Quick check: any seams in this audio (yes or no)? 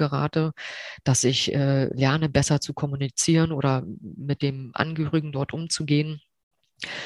no